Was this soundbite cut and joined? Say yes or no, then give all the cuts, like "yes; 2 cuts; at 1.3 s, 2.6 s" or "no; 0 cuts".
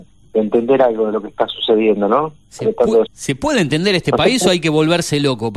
yes; 1 cut; at 3.1 s